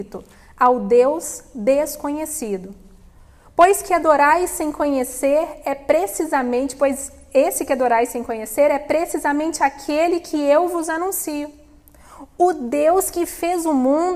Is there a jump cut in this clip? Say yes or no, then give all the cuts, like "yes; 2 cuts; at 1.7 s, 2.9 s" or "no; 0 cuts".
no; 0 cuts